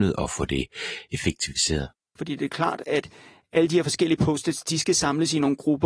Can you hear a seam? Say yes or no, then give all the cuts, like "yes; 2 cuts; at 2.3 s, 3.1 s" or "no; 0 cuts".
yes; 1 cut; at 2.2 s